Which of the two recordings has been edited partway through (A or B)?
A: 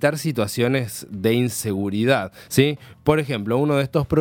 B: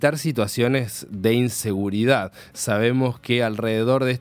A